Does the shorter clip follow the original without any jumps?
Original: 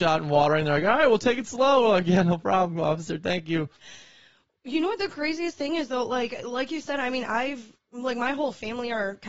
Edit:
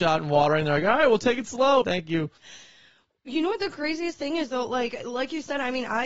no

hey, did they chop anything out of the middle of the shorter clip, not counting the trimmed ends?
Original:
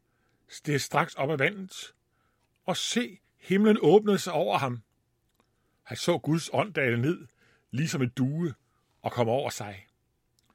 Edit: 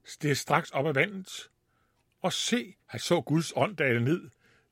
yes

